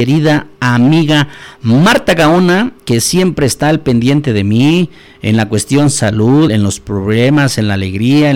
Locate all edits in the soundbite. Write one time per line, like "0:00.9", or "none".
0:06.5